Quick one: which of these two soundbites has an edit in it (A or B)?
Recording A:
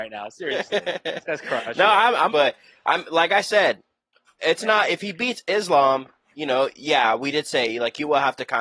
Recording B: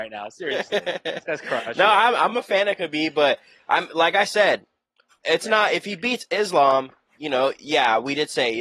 A